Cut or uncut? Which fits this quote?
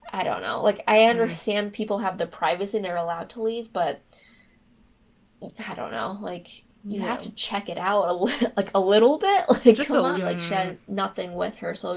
cut